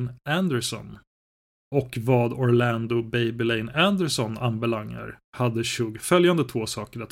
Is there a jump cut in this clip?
no; 0 cuts

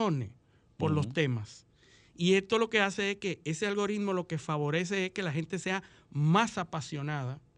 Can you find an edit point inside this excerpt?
no; 0 cuts

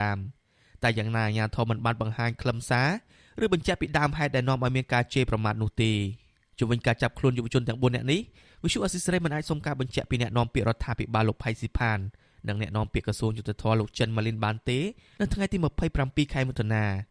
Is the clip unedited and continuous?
yes; 0 cuts

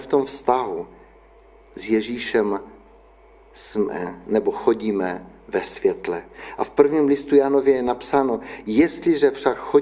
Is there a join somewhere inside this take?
no; 0 cuts

